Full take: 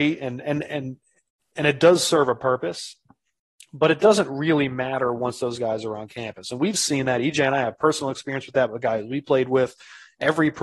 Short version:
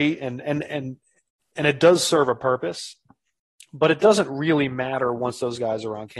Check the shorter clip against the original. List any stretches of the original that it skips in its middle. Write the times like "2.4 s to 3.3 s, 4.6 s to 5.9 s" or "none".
none